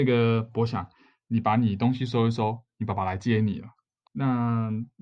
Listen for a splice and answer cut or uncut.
cut